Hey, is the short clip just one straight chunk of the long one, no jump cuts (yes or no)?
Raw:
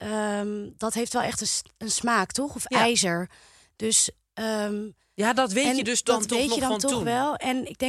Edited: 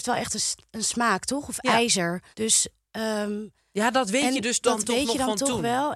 no